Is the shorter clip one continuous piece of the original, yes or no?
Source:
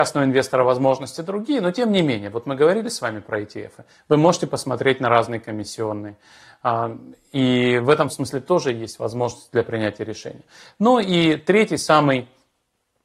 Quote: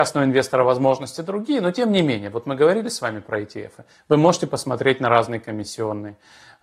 yes